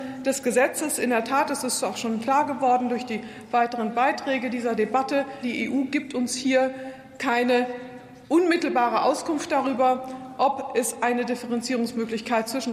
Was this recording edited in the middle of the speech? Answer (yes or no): yes